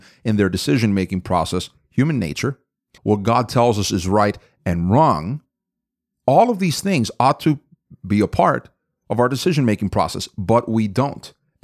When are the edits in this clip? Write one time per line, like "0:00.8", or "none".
0:03.0